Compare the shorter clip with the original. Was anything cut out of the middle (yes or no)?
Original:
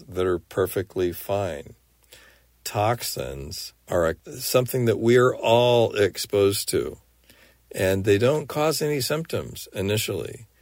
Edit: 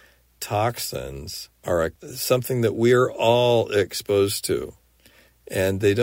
no